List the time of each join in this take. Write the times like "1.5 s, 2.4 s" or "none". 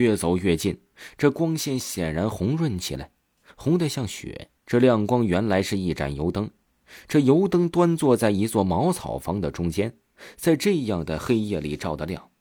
3.5 s, 4.6 s